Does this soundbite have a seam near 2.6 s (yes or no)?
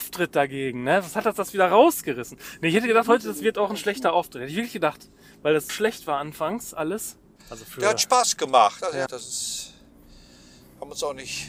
no